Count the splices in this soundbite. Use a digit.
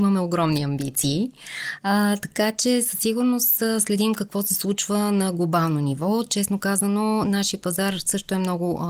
0